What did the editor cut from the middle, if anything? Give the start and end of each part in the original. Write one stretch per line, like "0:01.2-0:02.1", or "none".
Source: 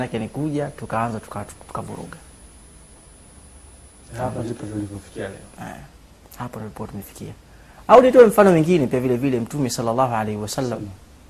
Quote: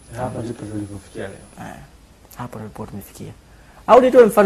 none